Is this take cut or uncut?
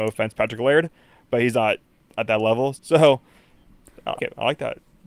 cut